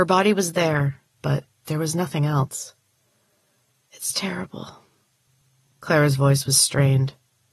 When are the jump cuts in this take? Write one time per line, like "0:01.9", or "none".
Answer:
0:01.1